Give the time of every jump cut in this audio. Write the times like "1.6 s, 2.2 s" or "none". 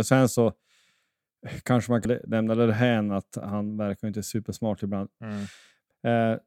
2.1 s, 5.2 s